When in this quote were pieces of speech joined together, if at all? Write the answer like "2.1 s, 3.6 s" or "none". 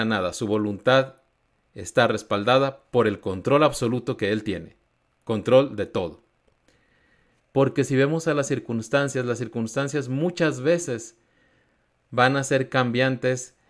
7.4 s

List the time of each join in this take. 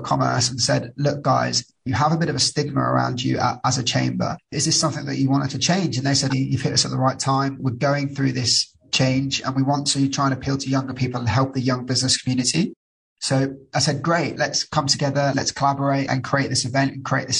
6.3 s

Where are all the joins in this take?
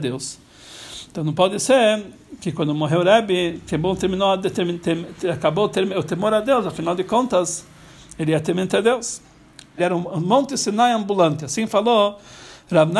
9.8 s

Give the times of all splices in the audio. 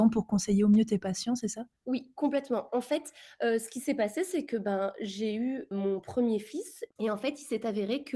6.9 s

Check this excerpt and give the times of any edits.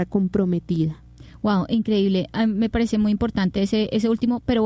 none

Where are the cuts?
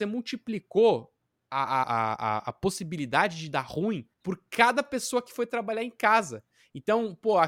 1.8 s, 4.1 s

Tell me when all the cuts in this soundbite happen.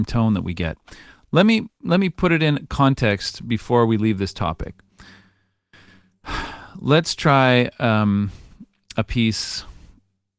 none

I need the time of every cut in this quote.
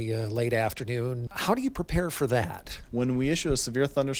1.3 s, 2.9 s

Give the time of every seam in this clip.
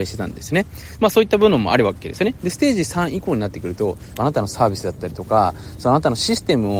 1.0 s, 2.4 s, 4.1 s

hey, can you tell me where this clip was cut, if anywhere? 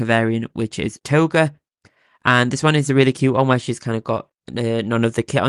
none

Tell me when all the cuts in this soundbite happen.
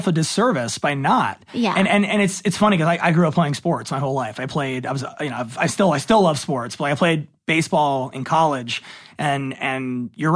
none

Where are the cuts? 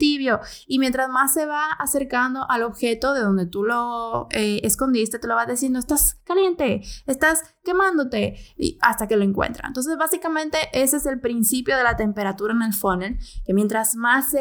none

